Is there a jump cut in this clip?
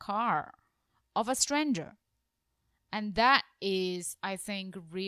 no; 0 cuts

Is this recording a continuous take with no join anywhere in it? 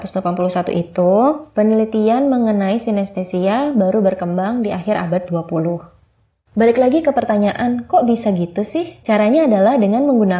no; 1 cut; at 9.0 s

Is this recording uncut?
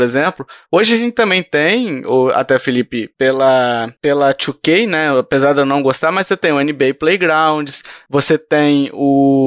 yes; 0 cuts

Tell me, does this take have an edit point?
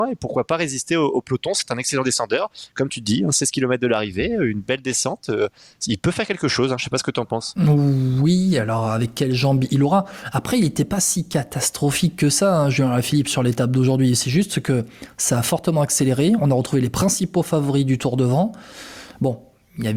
no; 0 cuts

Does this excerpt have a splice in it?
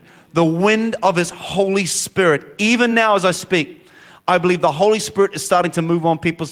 no; 0 cuts

